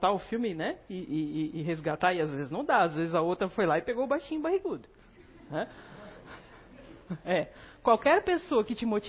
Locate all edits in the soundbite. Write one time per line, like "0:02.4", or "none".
none